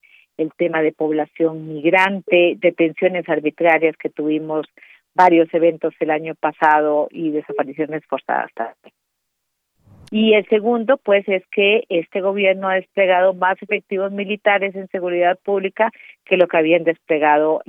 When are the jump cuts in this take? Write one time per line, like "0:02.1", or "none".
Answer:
0:10.1

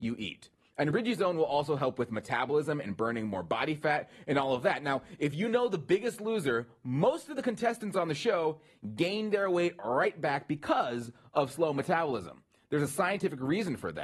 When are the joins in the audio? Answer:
none

